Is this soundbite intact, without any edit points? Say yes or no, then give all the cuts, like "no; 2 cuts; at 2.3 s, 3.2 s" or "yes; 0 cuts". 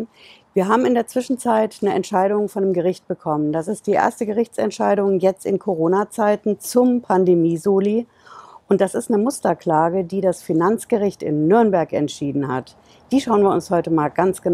yes; 0 cuts